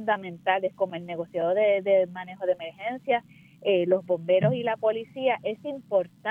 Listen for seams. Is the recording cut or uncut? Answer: uncut